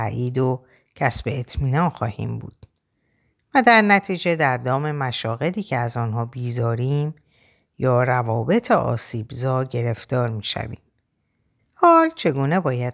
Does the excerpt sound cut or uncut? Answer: cut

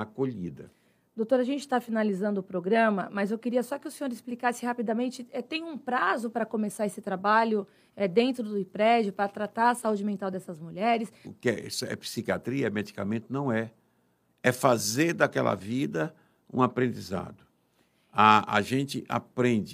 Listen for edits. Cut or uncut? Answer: cut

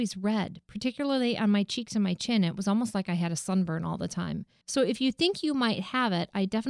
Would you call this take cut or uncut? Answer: cut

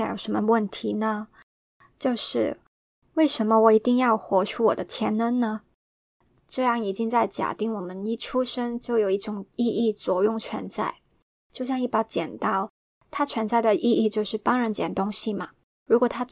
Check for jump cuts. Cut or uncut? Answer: uncut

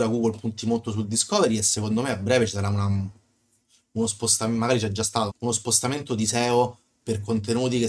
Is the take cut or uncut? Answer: cut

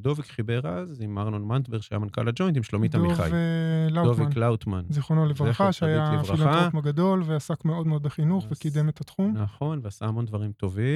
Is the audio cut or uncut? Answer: uncut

